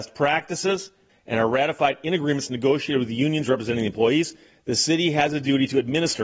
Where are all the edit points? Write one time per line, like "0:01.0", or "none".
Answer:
0:01.1